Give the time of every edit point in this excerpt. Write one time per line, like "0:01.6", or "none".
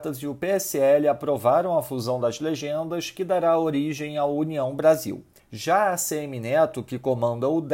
0:05.4